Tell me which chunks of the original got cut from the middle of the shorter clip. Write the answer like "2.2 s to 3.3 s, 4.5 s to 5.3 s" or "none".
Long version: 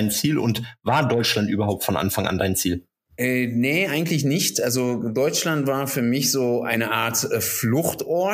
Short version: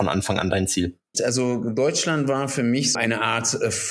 3.0 s to 4.5 s, 6.3 s to 6.6 s

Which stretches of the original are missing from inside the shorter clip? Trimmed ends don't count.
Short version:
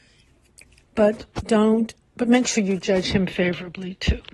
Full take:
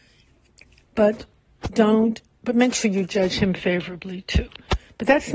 1.3 s to 1.6 s

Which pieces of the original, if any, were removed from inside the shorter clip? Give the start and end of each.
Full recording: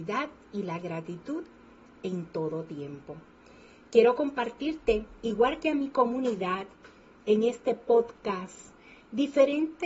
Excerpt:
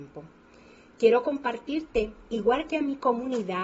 none

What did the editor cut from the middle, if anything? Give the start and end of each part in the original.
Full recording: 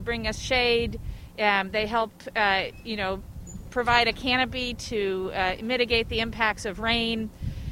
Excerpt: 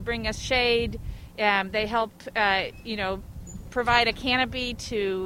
none

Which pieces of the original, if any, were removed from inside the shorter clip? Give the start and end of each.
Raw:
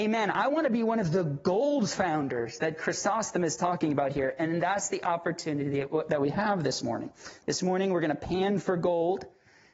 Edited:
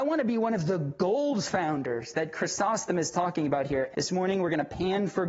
4.4 s to 7.4 s

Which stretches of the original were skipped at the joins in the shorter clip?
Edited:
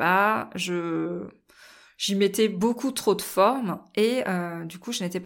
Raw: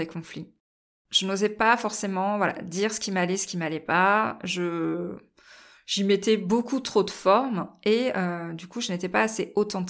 none

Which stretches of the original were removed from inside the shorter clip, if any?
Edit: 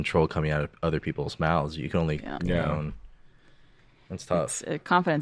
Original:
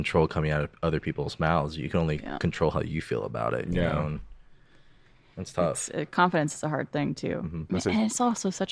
2.4 s to 3.7 s

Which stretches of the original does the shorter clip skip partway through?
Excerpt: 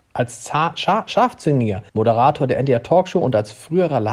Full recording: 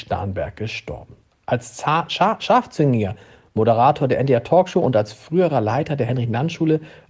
3.2 s to 3.5 s

